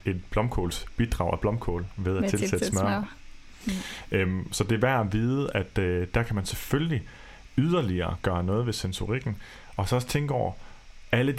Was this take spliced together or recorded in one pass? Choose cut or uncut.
uncut